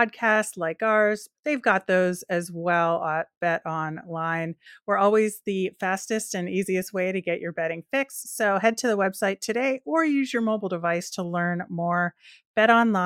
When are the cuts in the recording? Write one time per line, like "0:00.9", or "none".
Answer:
none